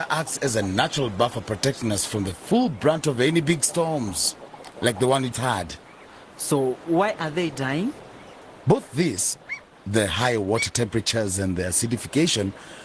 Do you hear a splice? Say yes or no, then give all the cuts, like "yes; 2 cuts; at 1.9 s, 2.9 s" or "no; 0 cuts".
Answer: yes; 2 cuts; at 5.3 s, 8.6 s